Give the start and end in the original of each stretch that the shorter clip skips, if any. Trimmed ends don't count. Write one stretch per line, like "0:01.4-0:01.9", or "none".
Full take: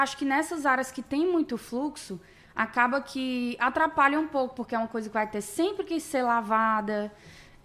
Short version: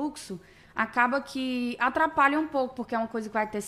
none